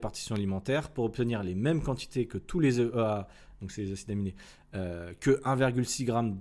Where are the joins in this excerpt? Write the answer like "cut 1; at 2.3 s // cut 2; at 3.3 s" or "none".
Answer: none